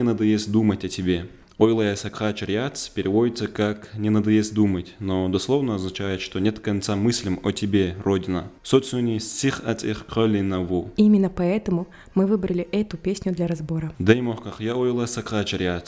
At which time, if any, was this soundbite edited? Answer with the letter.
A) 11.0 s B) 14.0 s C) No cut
A